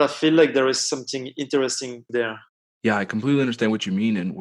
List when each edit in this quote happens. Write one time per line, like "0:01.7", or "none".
none